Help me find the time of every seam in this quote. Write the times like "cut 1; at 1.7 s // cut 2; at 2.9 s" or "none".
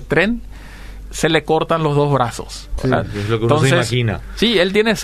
cut 1; at 2.8 s